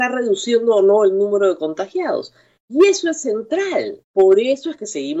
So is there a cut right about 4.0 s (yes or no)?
yes